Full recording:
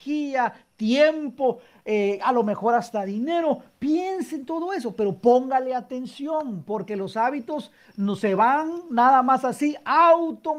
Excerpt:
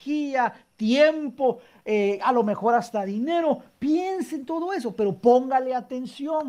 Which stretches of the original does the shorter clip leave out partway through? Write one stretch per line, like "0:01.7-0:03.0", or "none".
none